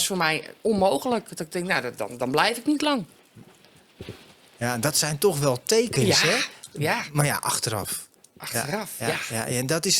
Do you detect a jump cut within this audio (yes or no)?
no